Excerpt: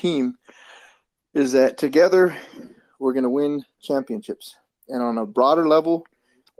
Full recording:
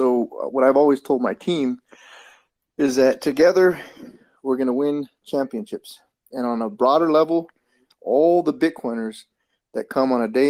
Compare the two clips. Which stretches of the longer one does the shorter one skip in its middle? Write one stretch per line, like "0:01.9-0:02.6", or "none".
none